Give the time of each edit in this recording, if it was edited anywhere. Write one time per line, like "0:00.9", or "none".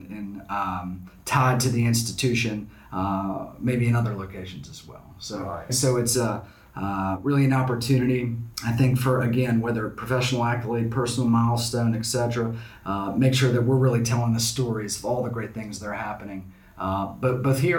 0:05.7